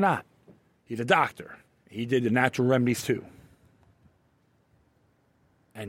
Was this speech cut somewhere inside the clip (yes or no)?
yes